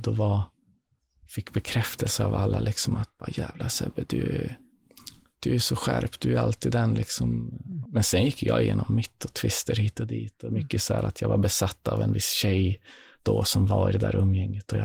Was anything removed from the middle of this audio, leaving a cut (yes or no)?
yes